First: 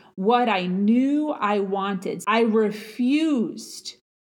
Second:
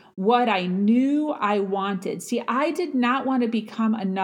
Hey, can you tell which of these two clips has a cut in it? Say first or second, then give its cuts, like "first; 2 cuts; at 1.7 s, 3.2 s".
first; 1 cut; at 2.2 s